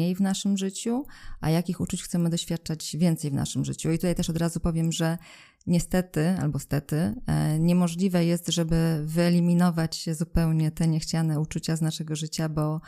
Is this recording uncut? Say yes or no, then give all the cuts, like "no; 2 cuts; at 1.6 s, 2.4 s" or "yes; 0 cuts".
yes; 0 cuts